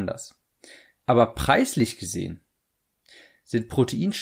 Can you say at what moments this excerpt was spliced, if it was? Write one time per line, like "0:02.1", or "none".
0:01.0